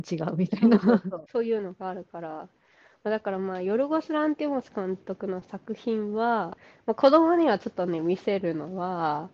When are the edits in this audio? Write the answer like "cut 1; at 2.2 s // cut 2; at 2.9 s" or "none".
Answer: none